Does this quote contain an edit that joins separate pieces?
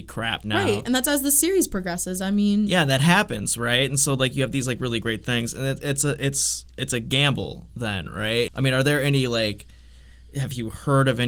yes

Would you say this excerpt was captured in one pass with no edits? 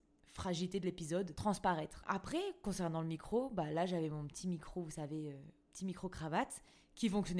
yes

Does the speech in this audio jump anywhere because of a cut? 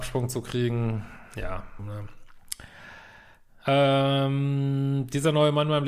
yes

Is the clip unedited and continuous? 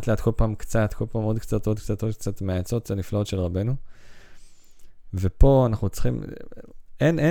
yes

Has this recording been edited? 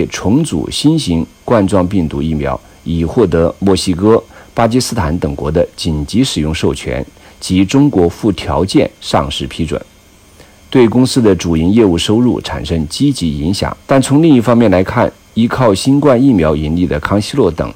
yes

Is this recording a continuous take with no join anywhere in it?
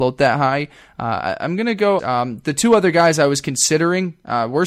no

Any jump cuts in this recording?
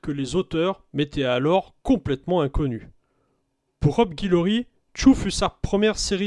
no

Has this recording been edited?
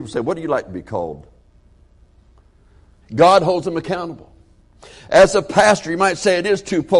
yes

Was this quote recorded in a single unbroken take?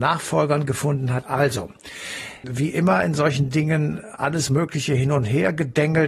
no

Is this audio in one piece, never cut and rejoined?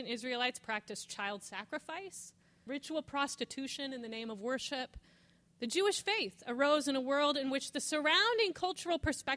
no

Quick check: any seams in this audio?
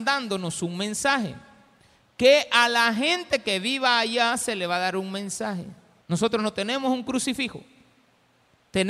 yes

